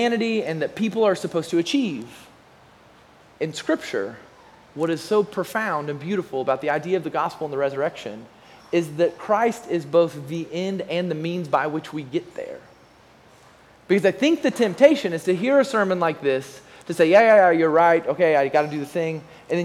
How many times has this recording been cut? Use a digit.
1